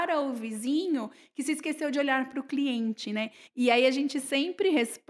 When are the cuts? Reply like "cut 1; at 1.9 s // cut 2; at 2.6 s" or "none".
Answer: cut 1; at 3.5 s